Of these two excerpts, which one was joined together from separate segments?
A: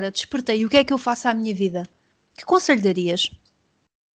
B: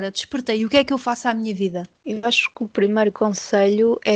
B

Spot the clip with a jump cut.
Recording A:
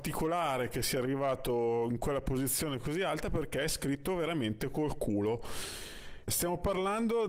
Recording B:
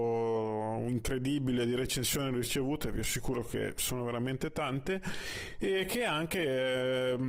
A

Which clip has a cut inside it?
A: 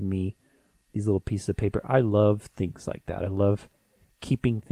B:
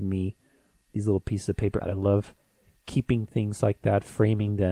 B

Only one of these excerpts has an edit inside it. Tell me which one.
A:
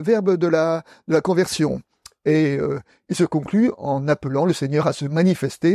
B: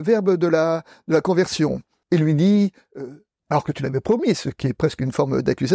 B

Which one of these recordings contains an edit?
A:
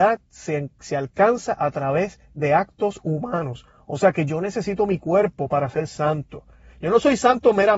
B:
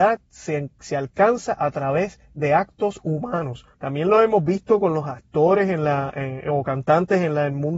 B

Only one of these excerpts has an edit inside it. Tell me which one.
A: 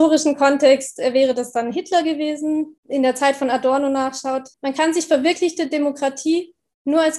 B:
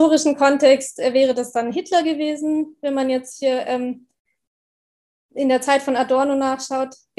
A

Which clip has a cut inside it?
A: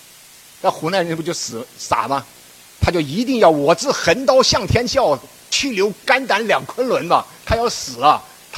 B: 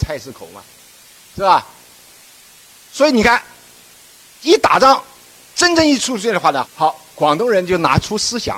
B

